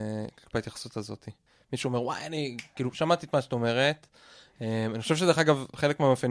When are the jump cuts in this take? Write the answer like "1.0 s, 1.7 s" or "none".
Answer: none